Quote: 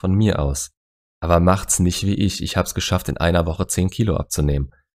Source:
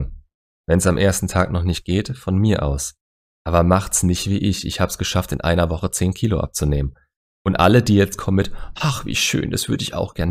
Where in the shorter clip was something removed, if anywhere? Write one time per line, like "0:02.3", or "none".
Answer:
none

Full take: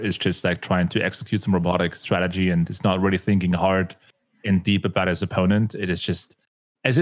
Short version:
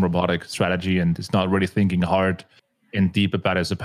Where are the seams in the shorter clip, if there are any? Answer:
none

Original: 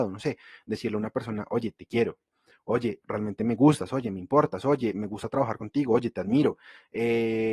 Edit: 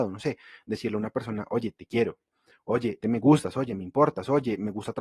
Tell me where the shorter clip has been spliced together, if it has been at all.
0:03.0

